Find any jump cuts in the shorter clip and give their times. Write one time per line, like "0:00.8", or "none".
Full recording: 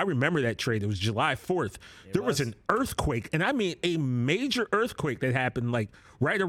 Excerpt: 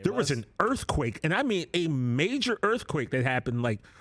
none